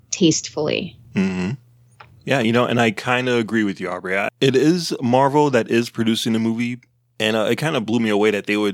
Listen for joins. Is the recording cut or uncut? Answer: cut